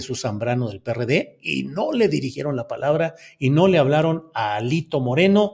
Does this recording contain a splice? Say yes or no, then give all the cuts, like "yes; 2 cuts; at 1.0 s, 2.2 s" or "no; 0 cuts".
no; 0 cuts